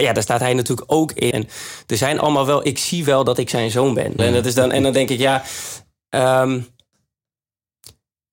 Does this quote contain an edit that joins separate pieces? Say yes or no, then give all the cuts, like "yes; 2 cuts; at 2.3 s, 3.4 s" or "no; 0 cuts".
yes; 2 cuts; at 1.3 s, 4.2 s